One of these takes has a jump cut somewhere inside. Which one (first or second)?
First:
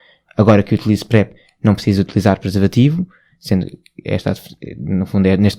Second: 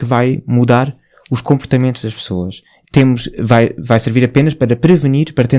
second